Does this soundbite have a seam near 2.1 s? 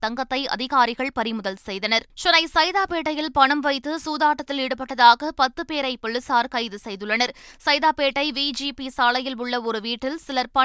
yes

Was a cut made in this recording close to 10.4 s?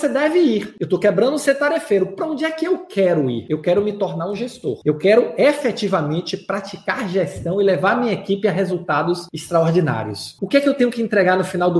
yes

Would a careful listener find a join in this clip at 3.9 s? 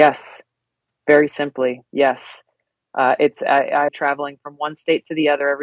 yes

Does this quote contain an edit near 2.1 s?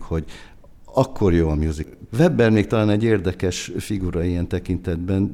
yes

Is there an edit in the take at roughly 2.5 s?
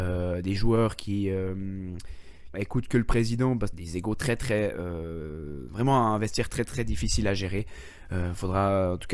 yes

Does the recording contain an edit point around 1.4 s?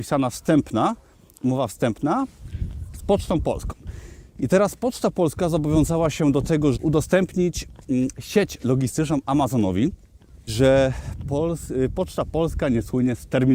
no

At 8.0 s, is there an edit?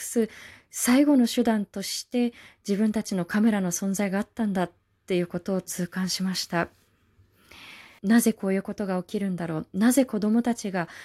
yes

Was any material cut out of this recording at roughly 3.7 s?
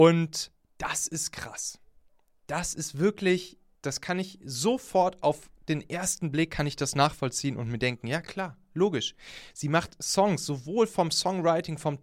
yes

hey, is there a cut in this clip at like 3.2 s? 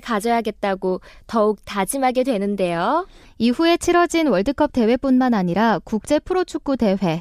yes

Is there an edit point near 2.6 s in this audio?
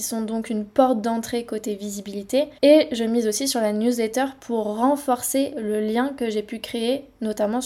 yes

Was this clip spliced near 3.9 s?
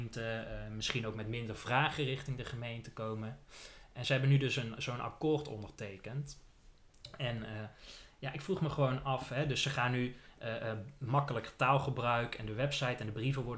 no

